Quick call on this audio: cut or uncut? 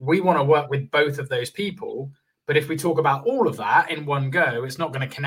uncut